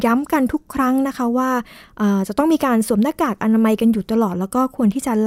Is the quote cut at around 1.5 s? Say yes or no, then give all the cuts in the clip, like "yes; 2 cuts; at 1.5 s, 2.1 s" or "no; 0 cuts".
no; 0 cuts